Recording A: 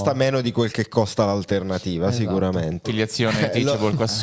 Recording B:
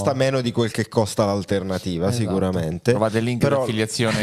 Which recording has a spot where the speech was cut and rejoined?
A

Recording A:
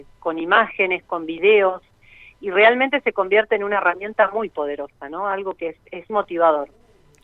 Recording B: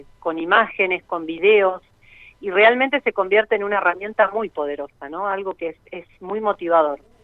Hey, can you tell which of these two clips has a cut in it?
A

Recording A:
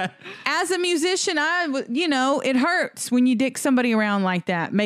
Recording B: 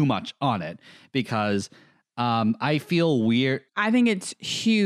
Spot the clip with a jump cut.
B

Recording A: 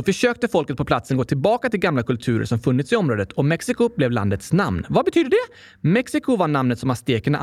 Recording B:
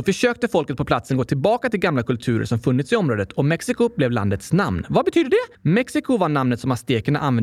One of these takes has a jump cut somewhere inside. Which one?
B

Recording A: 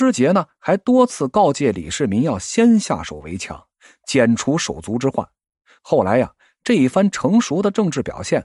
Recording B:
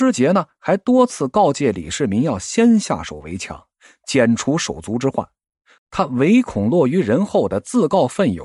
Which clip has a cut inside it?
B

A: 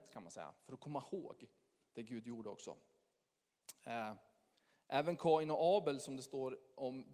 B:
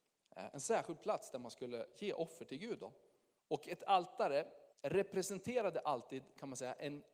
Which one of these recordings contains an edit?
B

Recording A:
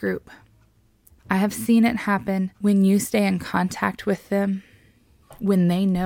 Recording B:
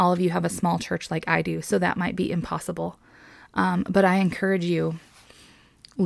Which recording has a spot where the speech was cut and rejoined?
A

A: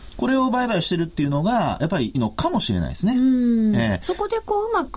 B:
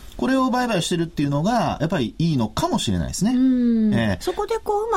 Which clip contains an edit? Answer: A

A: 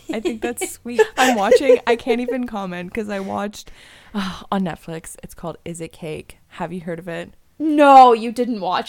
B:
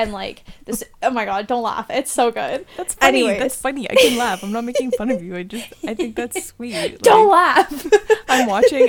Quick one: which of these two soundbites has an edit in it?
A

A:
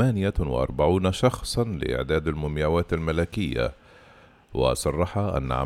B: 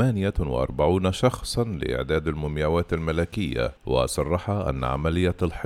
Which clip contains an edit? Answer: B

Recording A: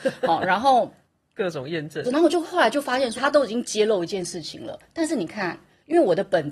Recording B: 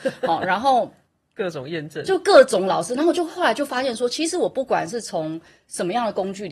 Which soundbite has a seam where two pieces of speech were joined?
A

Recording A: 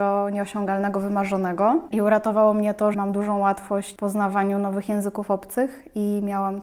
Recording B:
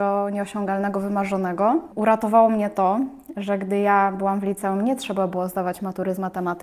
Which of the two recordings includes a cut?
A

